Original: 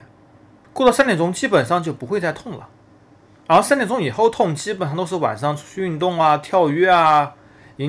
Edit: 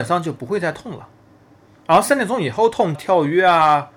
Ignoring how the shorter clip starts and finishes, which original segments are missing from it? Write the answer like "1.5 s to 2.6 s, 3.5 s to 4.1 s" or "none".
4.6 s to 6.4 s

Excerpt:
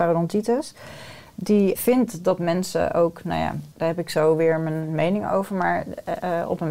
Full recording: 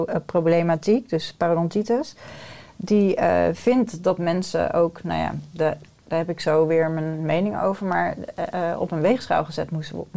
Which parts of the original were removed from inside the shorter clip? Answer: 3.2 s to 3.5 s, 5.5 s to 6.0 s

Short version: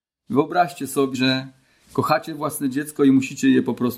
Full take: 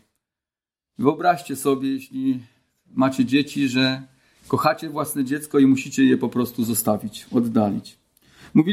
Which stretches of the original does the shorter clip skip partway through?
1.8 s to 3.7 s

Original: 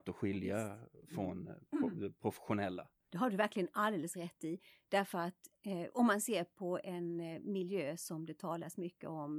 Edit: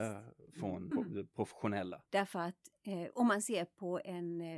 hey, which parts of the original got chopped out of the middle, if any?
1.5 s to 1.8 s, 2.9 s to 4.8 s

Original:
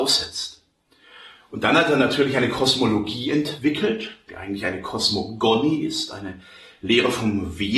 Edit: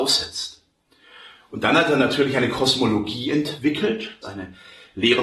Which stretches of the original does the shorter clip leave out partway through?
4.2 s to 6.1 s

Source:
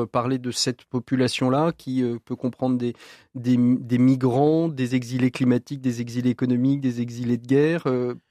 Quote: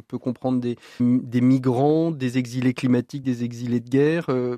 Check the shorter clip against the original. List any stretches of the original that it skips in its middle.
3.2 s to 3.6 s, 5.8 s to 6.8 s

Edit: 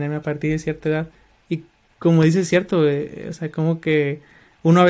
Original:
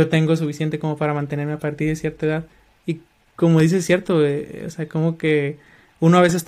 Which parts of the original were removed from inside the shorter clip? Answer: none

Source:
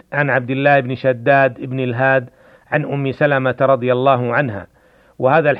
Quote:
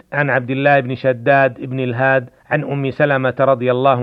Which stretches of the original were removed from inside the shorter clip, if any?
2.4 s to 2.6 s

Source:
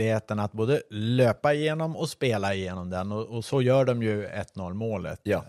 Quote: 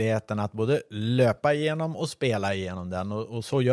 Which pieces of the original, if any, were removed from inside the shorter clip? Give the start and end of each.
none

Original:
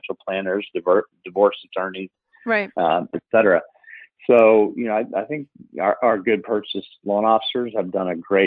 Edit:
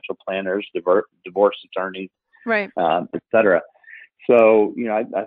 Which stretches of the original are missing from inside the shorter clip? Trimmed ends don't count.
none

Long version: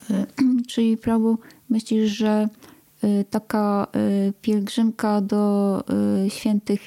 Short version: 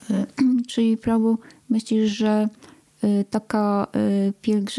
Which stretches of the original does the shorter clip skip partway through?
none

